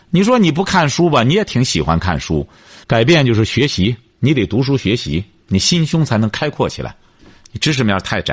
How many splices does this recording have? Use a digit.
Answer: 1